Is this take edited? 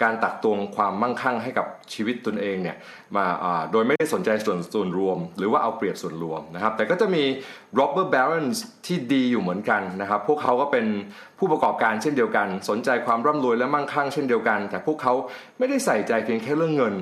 no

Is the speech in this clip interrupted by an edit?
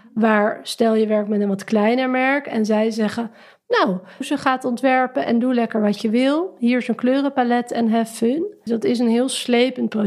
yes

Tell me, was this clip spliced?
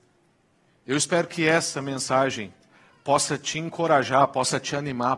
no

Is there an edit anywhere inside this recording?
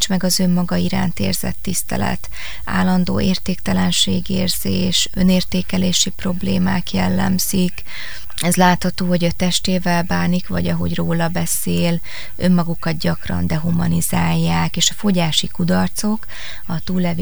no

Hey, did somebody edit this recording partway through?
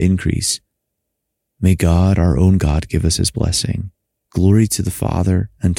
yes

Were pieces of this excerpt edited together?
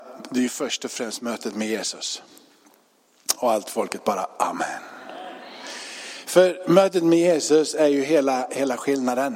no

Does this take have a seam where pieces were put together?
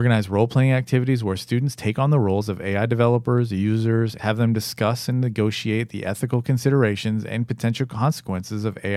yes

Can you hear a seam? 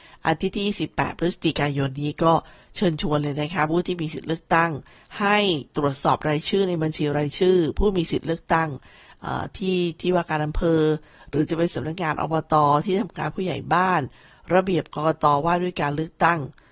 no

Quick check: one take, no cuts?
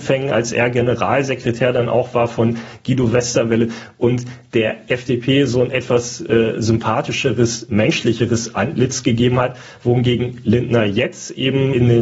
yes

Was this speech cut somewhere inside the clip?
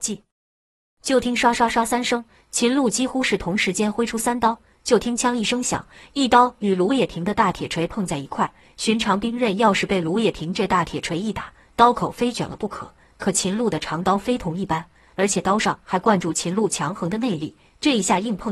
no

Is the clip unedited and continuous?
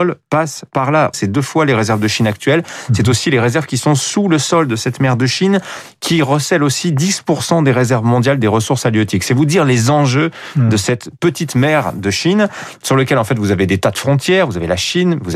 no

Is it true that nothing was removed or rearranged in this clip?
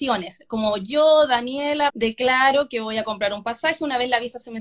no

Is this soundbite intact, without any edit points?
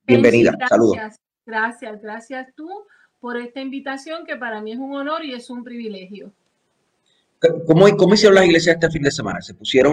yes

